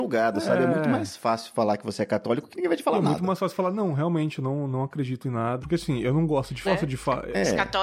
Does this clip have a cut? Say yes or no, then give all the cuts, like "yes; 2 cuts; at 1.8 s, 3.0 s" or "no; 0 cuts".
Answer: yes; 2 cuts; at 5.6 s, 6.6 s